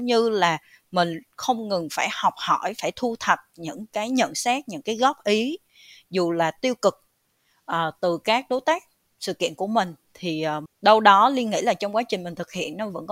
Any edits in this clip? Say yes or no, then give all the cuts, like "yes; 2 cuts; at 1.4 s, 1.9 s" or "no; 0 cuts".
yes; 1 cut; at 10.7 s